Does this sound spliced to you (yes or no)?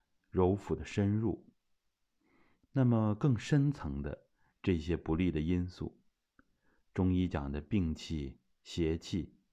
no